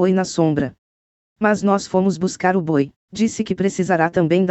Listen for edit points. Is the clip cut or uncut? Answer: cut